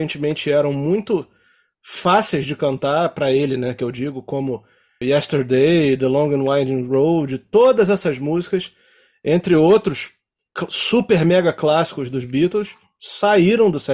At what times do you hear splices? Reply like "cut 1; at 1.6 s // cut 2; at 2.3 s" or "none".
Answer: cut 1; at 5.0 s